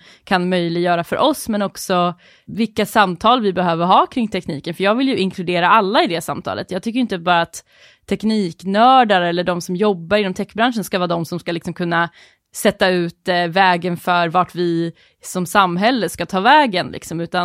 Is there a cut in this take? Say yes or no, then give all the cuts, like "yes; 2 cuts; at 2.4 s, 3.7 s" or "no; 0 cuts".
no; 0 cuts